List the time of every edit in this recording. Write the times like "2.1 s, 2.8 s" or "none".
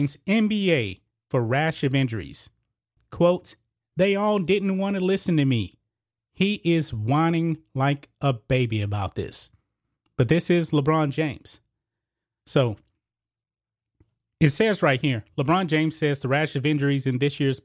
3.9 s